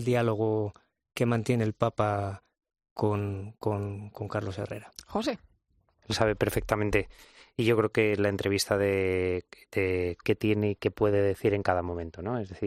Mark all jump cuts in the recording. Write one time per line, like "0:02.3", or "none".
0:06.0
0:10.2